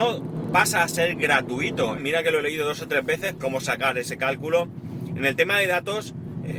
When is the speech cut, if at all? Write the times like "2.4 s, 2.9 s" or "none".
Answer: 2.0 s, 3.4 s